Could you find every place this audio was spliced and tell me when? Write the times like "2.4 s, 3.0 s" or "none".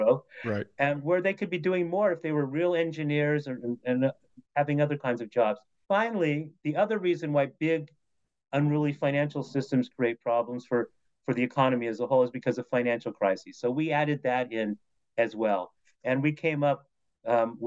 3.8 s, 5.8 s